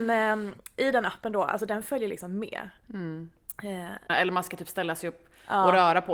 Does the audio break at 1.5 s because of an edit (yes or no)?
no